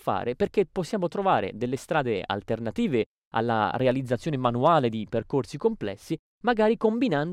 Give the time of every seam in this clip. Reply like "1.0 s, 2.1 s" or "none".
none

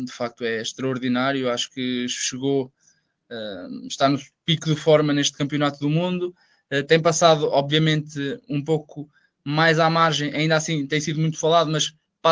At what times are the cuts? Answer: none

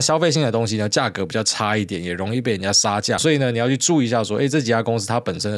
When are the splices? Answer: 3.2 s

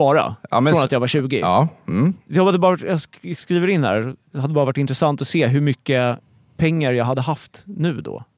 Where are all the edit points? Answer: none

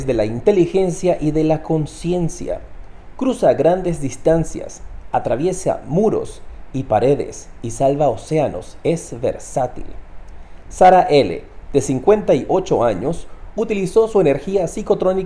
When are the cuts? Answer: none

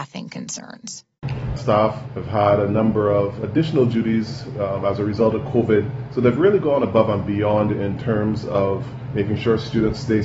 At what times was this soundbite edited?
none

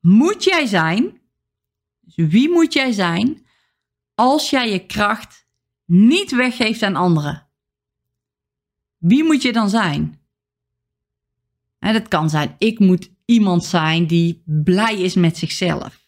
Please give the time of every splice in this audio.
none

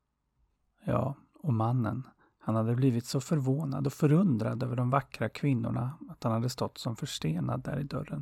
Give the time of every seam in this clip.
none

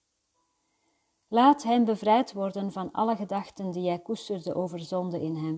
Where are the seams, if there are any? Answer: none

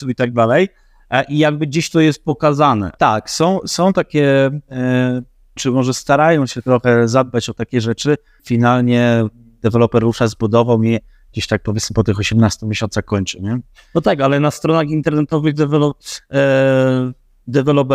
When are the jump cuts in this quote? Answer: 5.6 s, 8.4 s

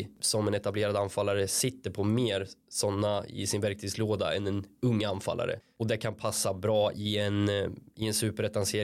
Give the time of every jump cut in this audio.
none

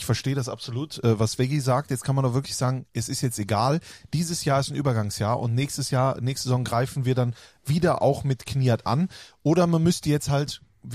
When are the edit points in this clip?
none

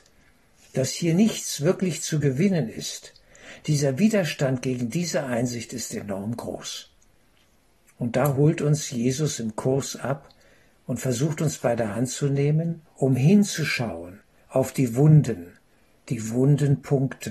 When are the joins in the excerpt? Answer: 12.9 s

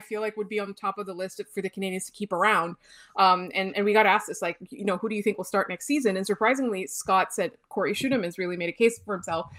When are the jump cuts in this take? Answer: none

